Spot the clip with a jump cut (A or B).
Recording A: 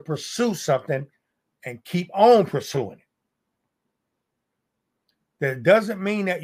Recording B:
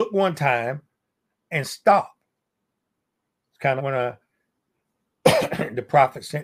B